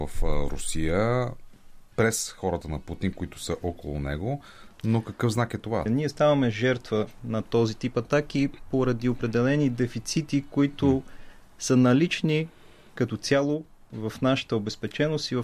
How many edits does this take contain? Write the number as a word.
two